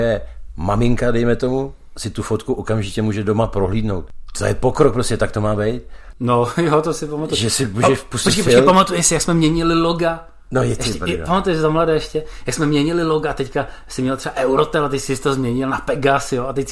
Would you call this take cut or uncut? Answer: cut